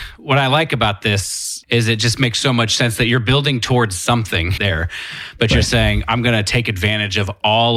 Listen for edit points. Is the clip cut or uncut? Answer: cut